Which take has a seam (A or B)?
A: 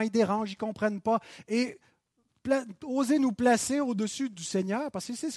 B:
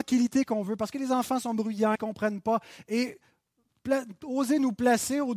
B